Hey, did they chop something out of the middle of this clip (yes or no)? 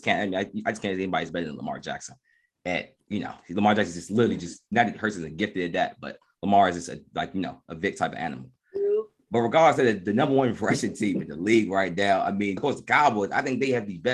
yes